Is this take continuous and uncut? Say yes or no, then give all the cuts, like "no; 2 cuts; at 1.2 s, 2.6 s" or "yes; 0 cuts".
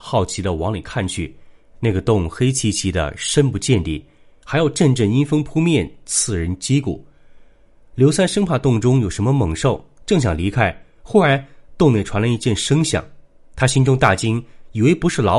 yes; 0 cuts